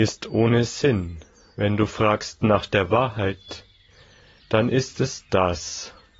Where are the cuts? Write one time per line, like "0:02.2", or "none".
none